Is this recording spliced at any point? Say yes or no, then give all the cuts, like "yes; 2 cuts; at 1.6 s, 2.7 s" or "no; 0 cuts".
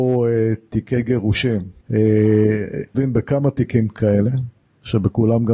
yes; 2 cuts; at 1.8 s, 2.9 s